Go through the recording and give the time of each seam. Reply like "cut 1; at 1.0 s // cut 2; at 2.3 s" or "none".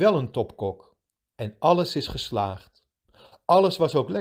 cut 1; at 1.3 s